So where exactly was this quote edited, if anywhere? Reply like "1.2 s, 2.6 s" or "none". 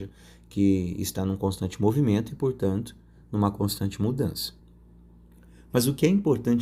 none